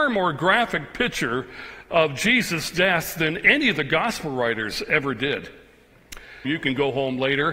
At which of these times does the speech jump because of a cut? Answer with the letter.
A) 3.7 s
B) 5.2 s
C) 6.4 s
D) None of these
C